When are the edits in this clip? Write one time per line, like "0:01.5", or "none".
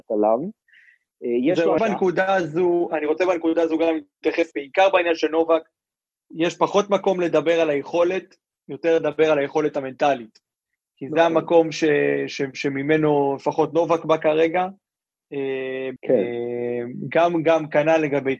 0:01.8
0:04.5
0:16.0